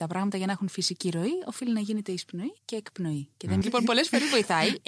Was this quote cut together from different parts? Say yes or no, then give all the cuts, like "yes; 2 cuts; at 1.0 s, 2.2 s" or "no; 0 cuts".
yes; 2 cuts; at 2.6 s, 3.6 s